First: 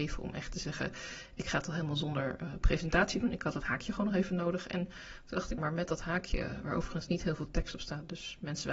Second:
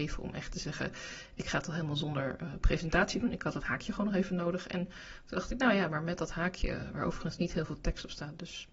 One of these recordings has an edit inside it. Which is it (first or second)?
first